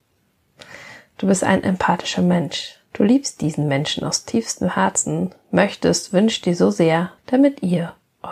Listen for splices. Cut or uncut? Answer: cut